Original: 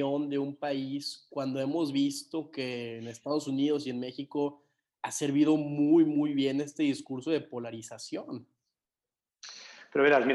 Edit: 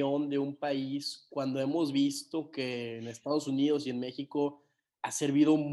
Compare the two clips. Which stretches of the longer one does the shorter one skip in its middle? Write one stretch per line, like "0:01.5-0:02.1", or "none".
none